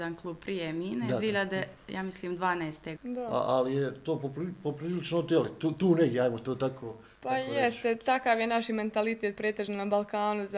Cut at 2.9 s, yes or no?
yes